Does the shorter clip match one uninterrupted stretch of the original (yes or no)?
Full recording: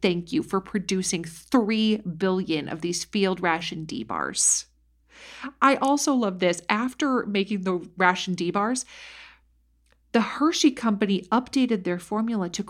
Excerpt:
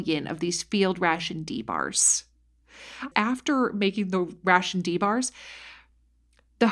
no